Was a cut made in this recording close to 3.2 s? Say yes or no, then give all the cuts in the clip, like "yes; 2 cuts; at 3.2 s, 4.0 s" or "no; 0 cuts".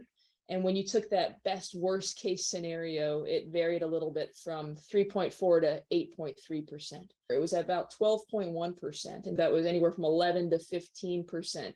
no; 2 cuts; at 7.3 s, 9.4 s